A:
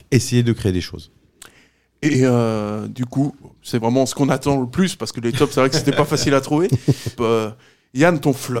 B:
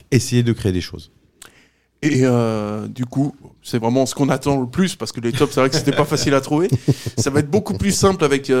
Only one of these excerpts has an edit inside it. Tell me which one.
A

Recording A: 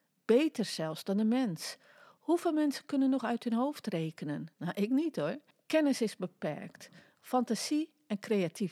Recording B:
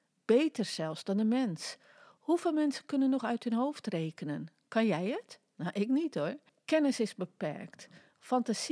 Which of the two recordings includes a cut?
A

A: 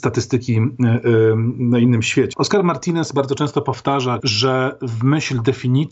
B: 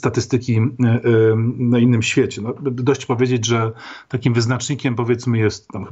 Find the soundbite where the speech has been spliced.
A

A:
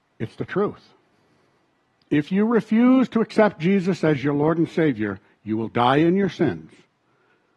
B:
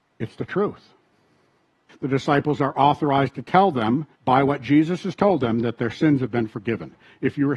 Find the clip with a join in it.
B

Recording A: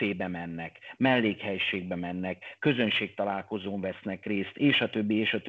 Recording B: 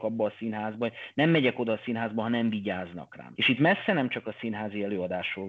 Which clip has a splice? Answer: B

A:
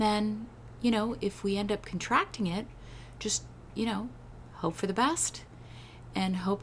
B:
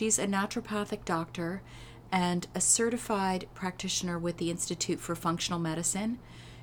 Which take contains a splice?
A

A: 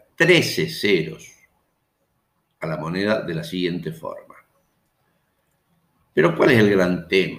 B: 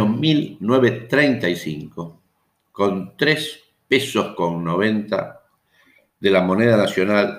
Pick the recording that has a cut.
A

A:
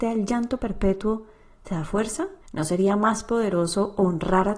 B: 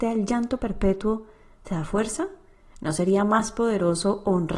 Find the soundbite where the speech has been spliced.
A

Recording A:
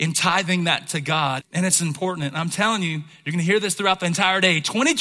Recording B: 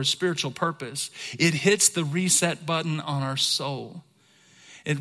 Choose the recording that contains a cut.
A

